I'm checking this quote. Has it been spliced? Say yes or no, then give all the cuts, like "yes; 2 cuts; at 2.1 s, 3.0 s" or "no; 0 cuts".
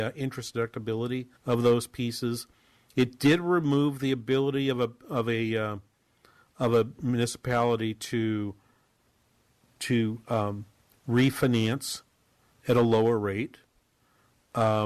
yes; 1 cut; at 1.4 s